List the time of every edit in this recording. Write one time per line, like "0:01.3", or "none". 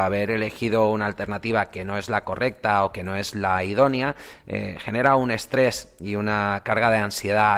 none